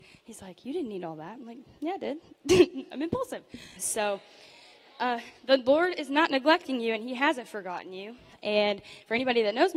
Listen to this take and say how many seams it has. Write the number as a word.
two